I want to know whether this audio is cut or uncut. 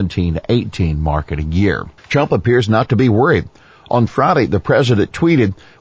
cut